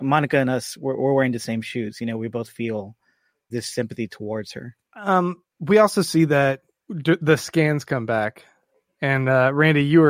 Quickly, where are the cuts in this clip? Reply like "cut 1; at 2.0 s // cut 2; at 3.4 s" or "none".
cut 1; at 3.5 s // cut 2; at 4.8 s